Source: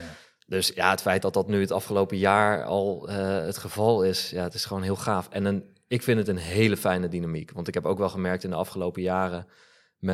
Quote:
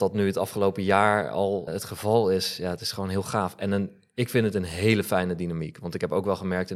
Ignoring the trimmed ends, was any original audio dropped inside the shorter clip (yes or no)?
yes